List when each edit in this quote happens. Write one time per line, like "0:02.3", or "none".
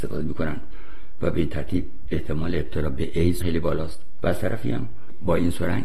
0:03.4